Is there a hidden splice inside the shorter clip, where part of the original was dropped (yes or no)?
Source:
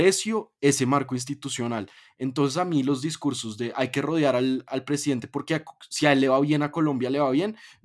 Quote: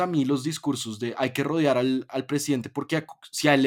no